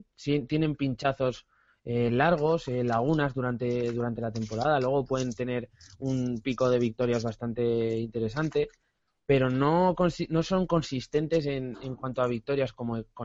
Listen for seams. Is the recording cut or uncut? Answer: uncut